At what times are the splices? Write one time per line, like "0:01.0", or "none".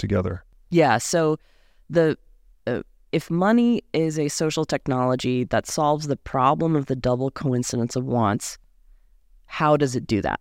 none

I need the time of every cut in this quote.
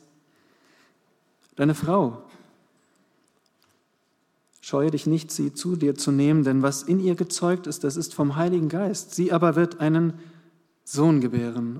0:01.4

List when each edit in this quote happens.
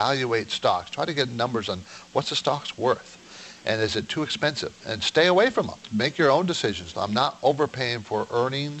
0:04.8
0:05.9
0:06.9

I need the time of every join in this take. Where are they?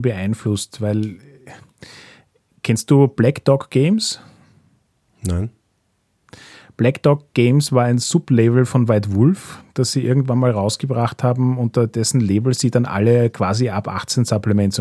none

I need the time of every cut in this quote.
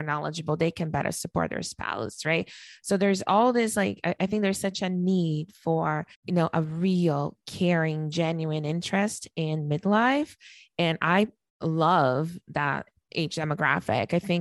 0:06.1

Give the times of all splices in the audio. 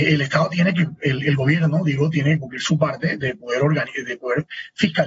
none

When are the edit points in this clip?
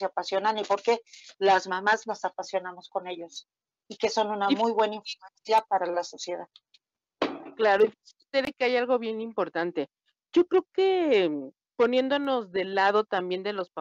none

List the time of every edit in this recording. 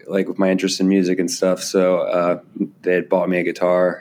none

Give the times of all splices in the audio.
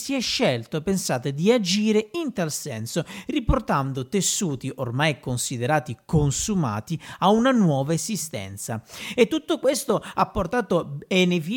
none

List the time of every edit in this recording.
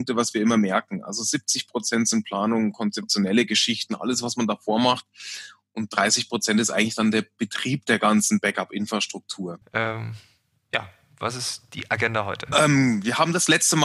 0:09.6

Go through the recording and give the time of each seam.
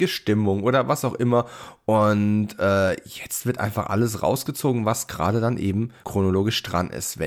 none

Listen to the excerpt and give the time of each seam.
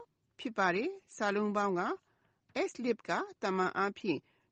0:02.7

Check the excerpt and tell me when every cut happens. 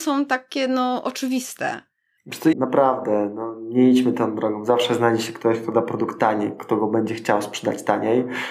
0:02.5

